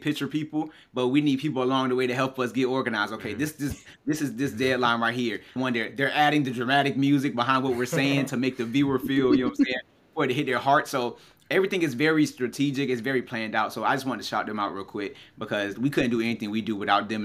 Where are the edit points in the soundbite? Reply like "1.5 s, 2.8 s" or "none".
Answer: 5.6 s